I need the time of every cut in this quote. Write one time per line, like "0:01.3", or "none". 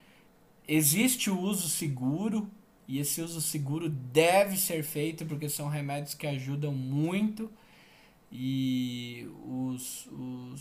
none